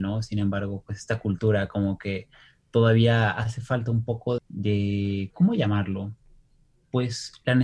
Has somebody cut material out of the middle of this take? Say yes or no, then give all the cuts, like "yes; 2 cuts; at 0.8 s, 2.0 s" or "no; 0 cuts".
yes; 1 cut; at 4.4 s